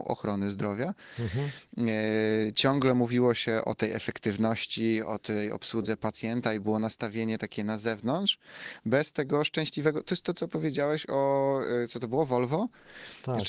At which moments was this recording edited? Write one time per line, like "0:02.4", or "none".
0:03.6

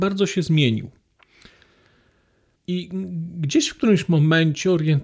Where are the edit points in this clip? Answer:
0:02.6

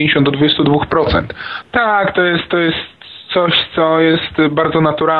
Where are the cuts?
0:01.6

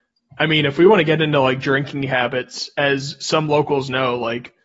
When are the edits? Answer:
none

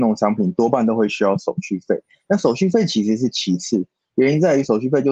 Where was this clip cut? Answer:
none

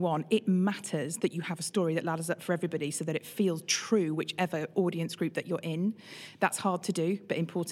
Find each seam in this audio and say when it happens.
none

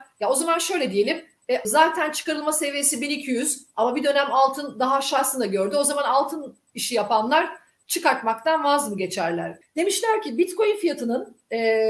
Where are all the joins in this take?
0:01.6
0:09.6

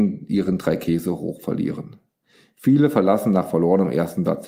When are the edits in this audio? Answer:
none

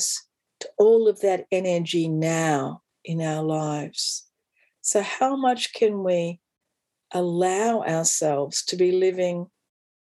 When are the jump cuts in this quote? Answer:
none

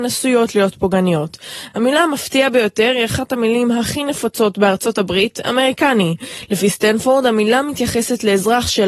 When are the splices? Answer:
none

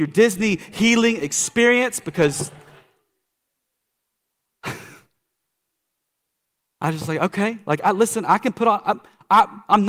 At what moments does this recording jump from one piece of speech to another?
none

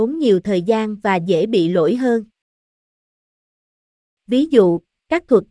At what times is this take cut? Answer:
0:04.2

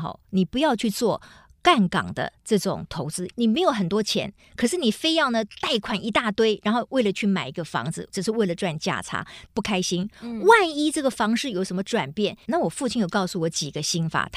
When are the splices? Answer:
0:03.3
0:09.5
0:12.4

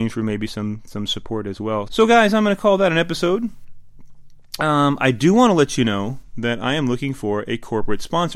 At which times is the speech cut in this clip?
0:01.9

